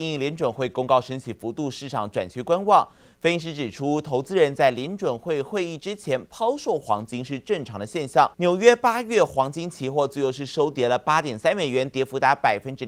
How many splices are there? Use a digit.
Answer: 1